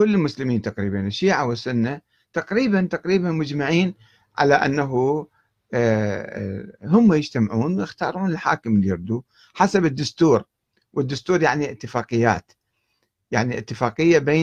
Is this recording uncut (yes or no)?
yes